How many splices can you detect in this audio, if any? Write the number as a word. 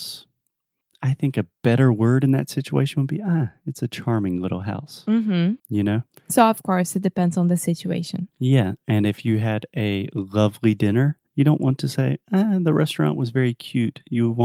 three